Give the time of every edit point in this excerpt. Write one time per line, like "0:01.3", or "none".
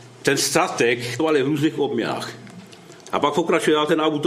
0:01.2
0:03.0